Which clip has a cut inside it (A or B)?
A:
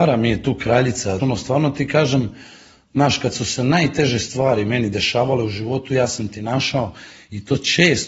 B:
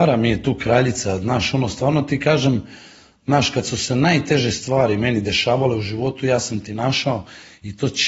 A